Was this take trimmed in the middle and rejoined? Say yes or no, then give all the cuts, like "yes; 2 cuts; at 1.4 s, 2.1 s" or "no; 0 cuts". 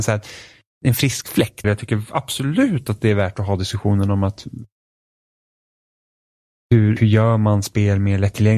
yes; 2 cuts; at 1.6 s, 7.0 s